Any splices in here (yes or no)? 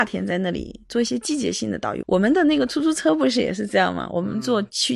yes